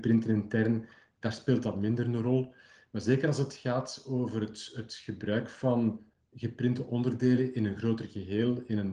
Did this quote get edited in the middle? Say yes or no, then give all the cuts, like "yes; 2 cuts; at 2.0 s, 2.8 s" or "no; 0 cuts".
no; 0 cuts